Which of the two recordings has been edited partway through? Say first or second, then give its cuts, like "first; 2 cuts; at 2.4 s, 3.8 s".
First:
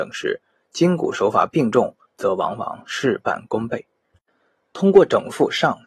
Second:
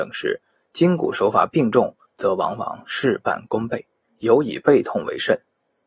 second; 1 cut; at 4.1 s